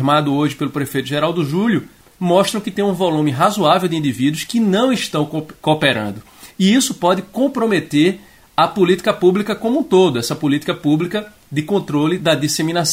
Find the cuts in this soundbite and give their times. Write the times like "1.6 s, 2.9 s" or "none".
none